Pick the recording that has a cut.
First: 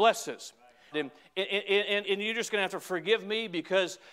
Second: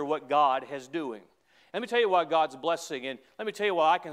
first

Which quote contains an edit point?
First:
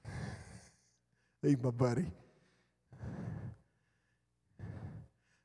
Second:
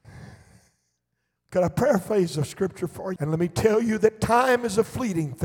second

